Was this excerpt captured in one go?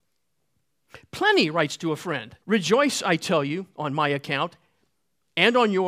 no; 1 cut; at 2.4 s

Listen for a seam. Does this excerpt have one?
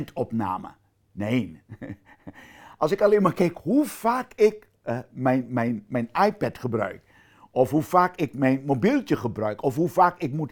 no; 0 cuts

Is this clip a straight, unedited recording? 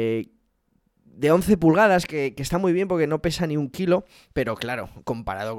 no; 1 cut; at 2.1 s

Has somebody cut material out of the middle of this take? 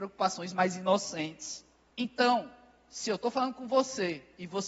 yes; 1 cut; at 1.9 s

